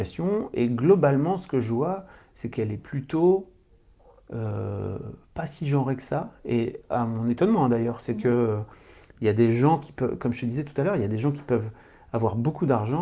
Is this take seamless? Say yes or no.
yes